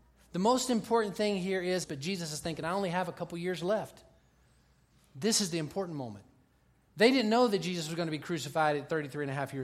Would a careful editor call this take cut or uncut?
cut